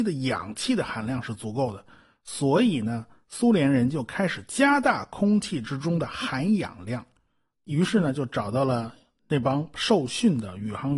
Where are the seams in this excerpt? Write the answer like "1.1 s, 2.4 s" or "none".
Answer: 7.5 s